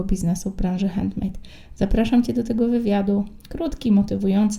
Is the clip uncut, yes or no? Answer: yes